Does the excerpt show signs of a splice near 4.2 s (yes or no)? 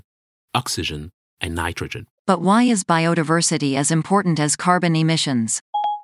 no